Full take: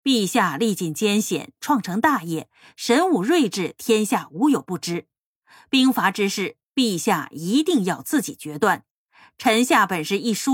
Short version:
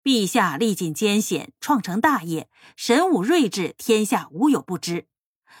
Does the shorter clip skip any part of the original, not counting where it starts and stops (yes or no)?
no